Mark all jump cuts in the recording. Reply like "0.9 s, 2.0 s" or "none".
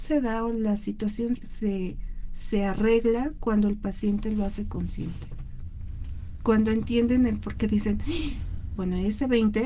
1.4 s, 8.8 s